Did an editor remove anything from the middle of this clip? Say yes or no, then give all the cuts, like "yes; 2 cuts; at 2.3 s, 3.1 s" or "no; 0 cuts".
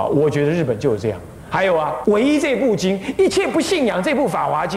yes; 1 cut; at 2.0 s